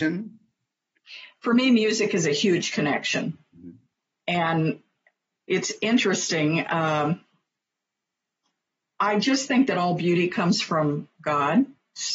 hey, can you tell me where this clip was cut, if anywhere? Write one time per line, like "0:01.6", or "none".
none

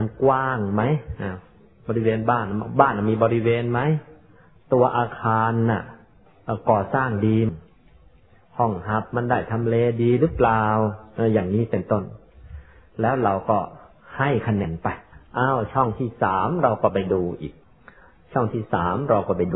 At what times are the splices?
0:07.5
0:14.6

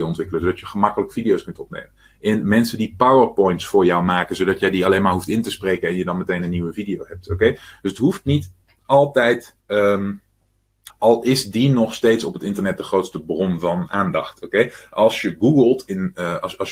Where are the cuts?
0:09.6
0:10.9

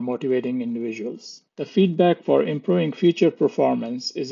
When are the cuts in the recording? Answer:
none

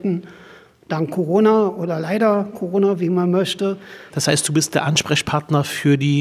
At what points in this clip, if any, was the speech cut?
0:04.1

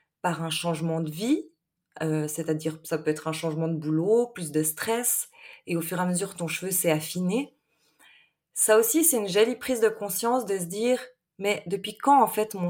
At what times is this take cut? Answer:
none

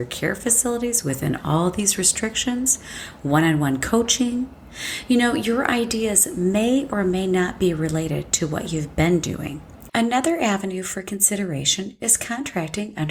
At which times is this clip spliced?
0:09.9

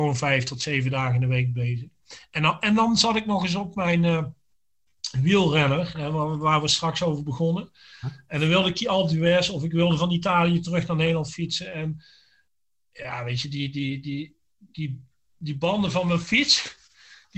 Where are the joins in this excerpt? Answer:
none

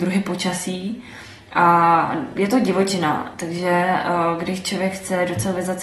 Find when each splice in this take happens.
none

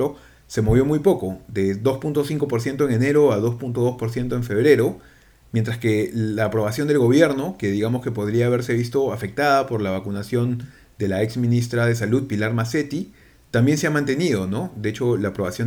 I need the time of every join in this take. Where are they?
none

